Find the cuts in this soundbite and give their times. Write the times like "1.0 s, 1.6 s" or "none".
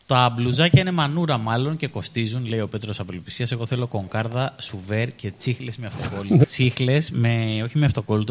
6.4 s